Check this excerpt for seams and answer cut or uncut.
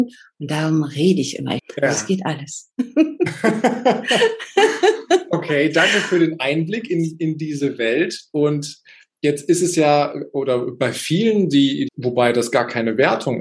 cut